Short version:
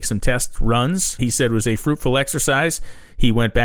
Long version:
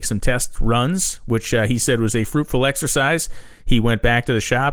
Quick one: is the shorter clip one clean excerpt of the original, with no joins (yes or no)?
no